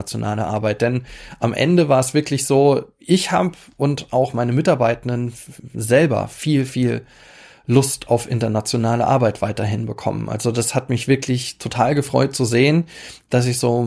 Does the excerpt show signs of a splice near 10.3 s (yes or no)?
no